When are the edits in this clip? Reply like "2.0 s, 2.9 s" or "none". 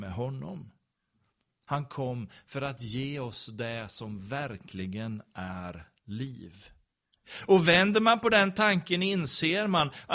none